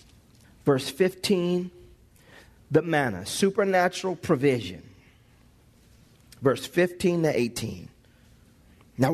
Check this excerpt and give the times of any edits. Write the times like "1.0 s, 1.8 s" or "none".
none